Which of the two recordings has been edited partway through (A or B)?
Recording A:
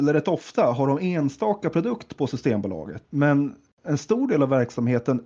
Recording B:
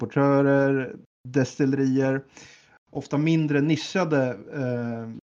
A